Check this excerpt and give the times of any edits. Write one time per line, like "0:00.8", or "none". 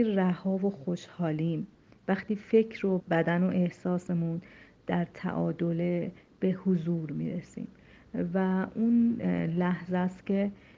0:03.0